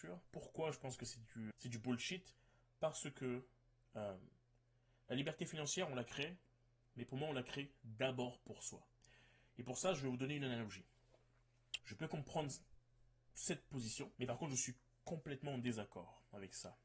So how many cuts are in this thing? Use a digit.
3